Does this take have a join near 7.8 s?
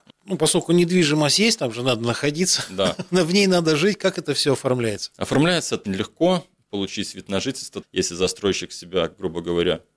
yes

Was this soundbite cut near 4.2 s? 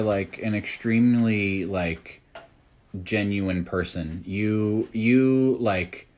no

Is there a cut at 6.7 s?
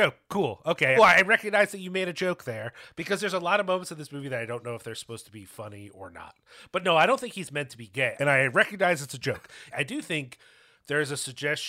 no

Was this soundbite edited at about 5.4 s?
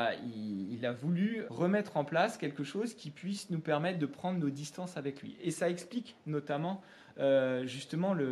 no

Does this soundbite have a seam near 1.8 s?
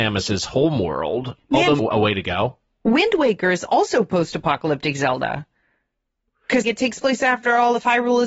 yes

